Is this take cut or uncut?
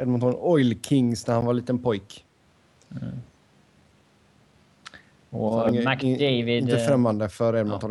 uncut